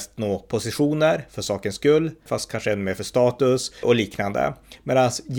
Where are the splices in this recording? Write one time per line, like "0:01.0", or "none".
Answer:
0:02.3
0:03.8